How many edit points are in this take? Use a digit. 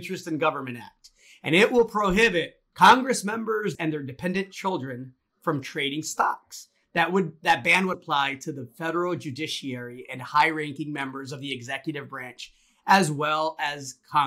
3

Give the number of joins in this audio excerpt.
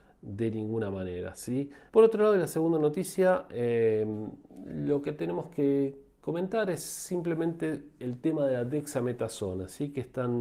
1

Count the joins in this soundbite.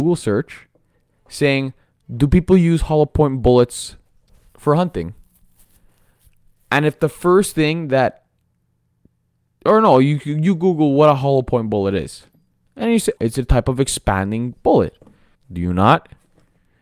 2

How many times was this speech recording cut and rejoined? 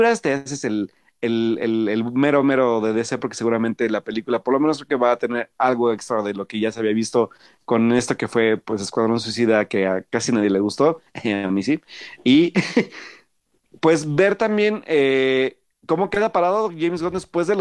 0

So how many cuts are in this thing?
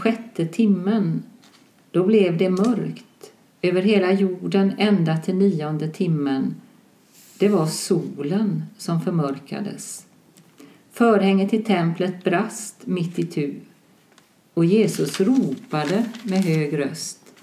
0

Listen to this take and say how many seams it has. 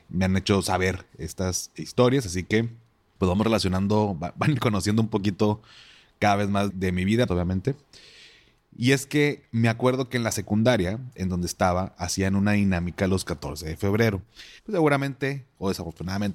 2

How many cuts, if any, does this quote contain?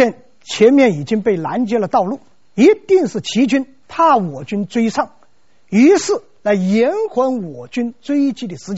2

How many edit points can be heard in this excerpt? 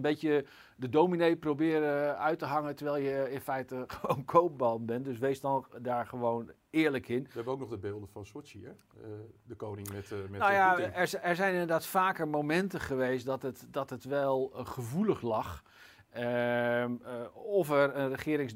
0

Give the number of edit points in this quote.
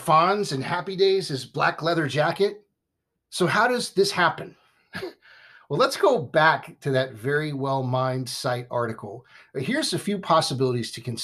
1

